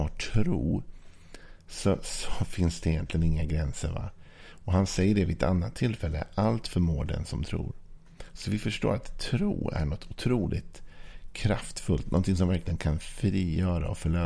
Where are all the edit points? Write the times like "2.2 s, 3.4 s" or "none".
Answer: none